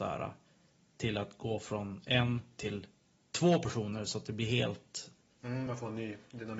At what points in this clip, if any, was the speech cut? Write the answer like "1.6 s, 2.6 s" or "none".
none